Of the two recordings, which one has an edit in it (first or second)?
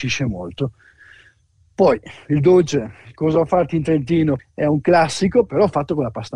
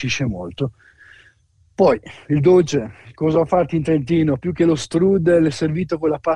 first